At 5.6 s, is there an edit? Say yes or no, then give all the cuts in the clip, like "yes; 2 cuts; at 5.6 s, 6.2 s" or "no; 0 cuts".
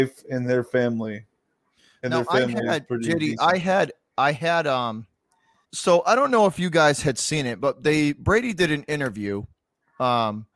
yes; 1 cut; at 5.6 s